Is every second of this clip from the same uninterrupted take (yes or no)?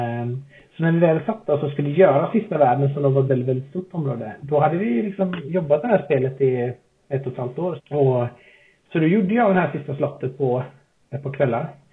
no